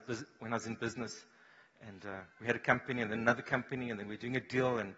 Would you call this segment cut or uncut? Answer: uncut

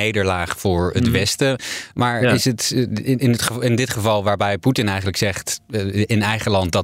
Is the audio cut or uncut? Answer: uncut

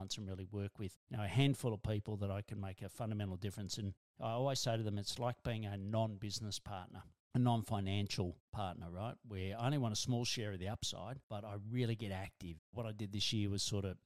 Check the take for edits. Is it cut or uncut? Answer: cut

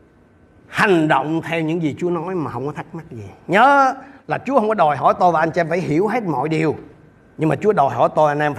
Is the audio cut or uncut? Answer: uncut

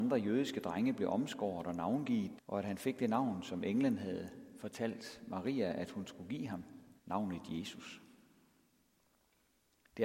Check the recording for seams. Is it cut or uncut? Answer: cut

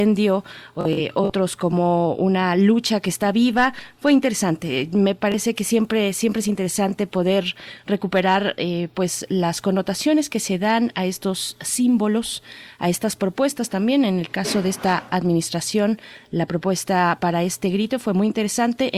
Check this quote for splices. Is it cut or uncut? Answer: uncut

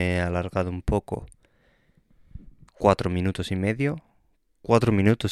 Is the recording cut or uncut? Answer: cut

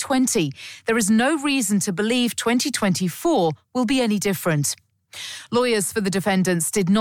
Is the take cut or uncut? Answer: uncut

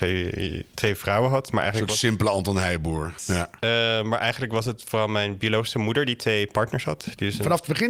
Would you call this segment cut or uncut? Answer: cut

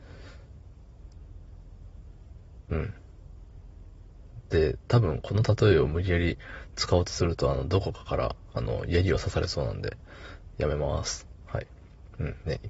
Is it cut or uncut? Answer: uncut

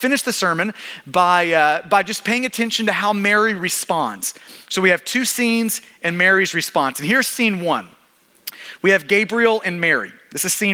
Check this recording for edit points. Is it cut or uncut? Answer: uncut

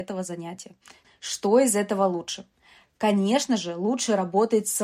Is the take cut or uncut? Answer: cut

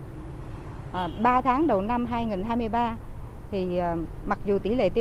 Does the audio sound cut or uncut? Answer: uncut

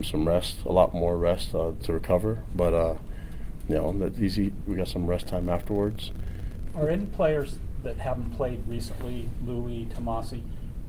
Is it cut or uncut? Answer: cut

